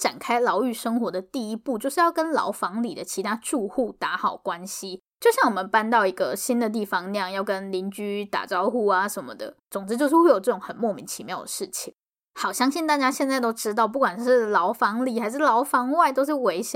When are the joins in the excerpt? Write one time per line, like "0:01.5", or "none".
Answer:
0:05.1
0:09.6